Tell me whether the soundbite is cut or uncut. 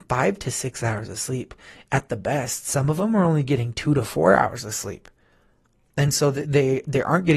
uncut